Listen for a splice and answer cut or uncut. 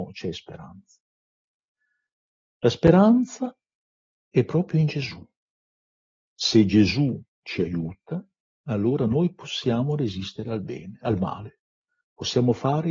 uncut